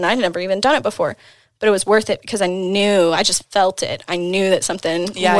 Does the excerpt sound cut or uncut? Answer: uncut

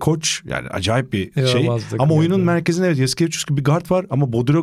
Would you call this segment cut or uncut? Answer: uncut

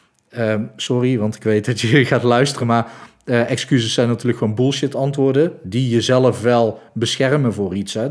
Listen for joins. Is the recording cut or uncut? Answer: uncut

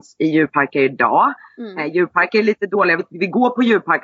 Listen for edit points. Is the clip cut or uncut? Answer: uncut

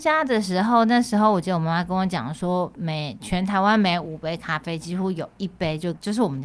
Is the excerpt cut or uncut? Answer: uncut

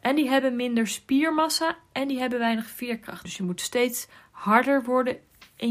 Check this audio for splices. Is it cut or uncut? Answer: cut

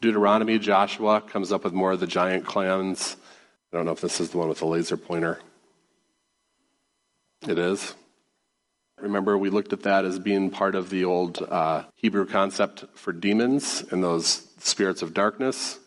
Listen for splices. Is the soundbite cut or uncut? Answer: cut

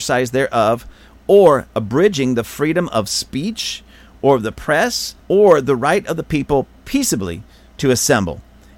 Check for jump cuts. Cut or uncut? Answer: uncut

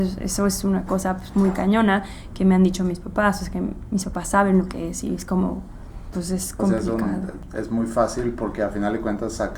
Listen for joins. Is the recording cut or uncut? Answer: cut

